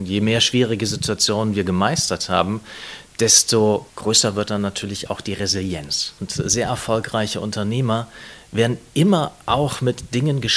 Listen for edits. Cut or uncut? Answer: cut